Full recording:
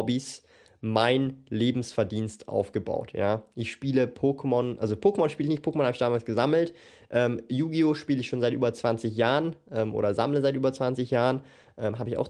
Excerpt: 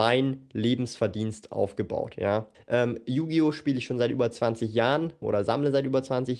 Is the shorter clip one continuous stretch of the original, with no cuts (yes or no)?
no